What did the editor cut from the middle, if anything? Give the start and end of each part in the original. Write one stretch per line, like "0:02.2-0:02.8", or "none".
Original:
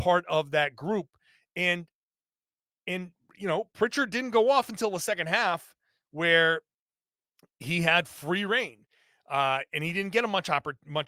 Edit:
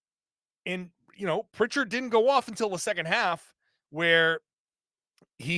none